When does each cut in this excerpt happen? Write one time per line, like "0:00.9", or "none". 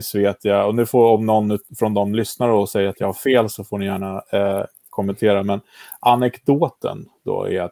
none